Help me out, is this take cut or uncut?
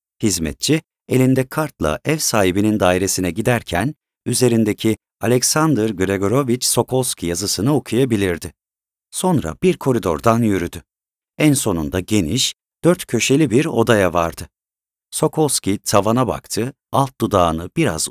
cut